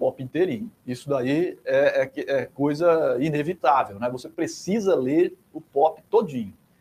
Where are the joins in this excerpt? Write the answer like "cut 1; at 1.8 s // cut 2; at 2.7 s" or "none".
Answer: none